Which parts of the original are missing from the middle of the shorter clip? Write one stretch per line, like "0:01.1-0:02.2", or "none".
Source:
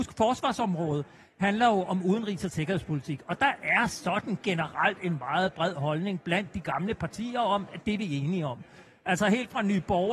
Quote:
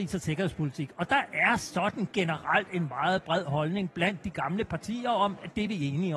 none